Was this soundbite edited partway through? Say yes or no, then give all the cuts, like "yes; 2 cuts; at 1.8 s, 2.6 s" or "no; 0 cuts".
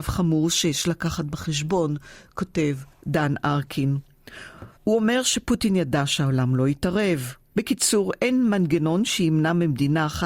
yes; 2 cuts; at 4.8 s, 7.5 s